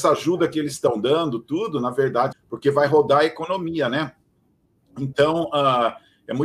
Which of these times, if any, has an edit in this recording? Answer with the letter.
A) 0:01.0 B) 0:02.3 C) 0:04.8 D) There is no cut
B